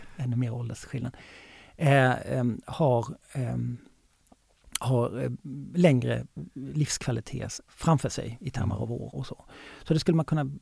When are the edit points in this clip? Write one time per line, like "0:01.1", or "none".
0:07.7
0:09.1

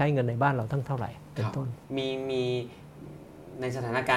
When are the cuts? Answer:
0:01.8

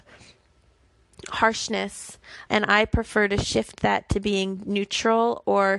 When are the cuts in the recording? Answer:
0:02.5

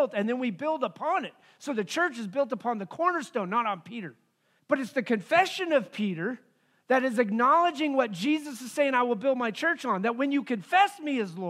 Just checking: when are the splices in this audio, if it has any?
0:04.6

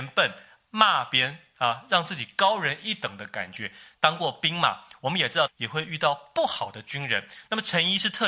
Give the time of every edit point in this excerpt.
0:03.9
0:05.5

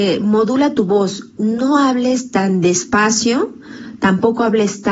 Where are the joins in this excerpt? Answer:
none

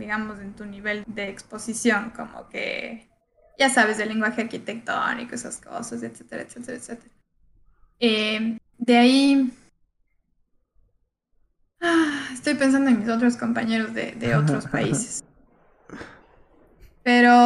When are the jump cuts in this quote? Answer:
0:01.0

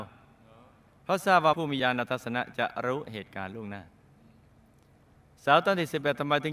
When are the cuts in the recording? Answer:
none

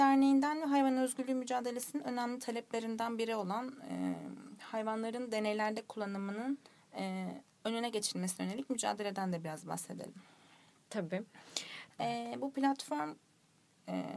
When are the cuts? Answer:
0:11.9

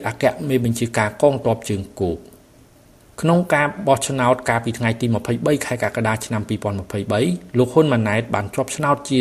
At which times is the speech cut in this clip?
none

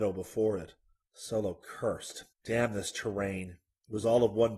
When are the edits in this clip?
0:01.0
0:02.3

